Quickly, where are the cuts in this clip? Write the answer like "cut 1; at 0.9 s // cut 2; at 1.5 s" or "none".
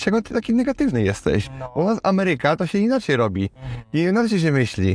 none